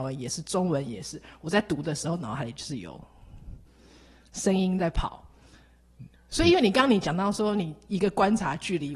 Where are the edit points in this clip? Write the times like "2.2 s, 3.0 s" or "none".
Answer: none